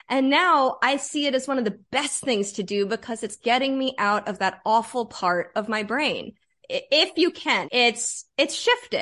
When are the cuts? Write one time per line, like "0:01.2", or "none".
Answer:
0:06.6
0:07.6